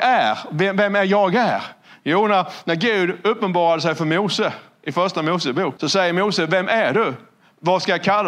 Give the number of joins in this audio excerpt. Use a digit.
1